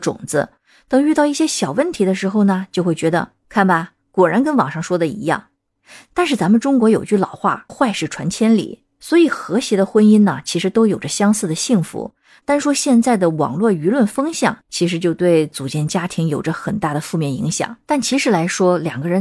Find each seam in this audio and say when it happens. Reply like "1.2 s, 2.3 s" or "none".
7.7 s, 12.4 s, 17.8 s